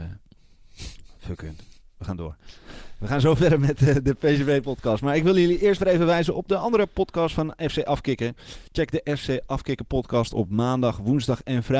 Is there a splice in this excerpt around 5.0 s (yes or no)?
no